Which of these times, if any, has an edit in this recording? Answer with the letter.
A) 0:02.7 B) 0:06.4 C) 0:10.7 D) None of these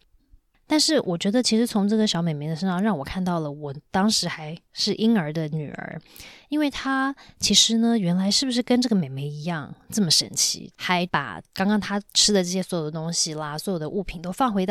C